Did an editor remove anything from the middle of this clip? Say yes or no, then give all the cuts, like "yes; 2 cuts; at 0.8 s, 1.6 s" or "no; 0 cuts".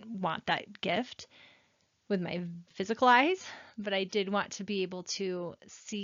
no; 0 cuts